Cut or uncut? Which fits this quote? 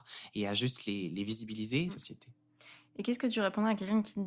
cut